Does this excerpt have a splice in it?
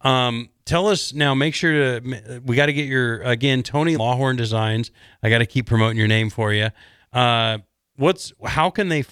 yes; 1 cut; at 4.0 s

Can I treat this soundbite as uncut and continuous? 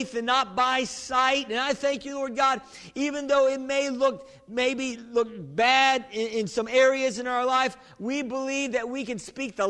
yes; 0 cuts

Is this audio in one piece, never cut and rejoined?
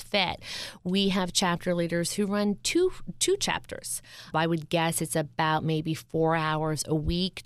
no; 1 cut; at 4.3 s

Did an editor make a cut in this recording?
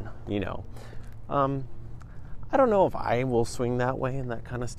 no; 0 cuts

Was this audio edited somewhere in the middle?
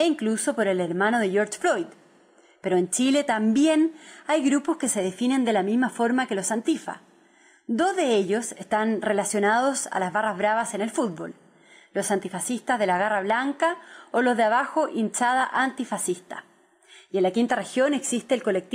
no; 0 cuts

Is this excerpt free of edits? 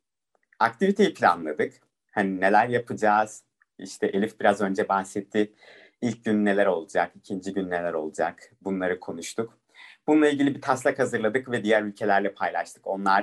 yes; 0 cuts

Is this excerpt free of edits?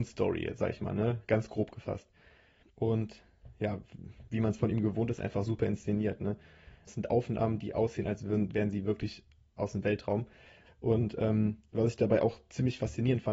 no; 3 cuts; at 2.6 s, 6.9 s, 10.7 s

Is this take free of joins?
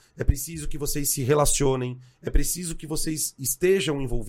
yes; 0 cuts

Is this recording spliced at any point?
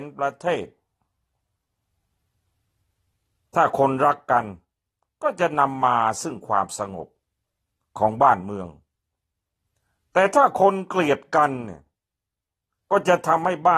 no; 0 cuts

